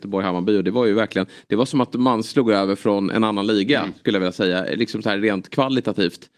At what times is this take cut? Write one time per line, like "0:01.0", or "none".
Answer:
none

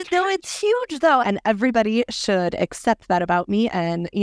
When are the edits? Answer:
0:01.2

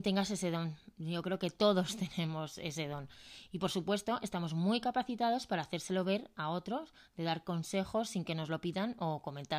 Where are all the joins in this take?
none

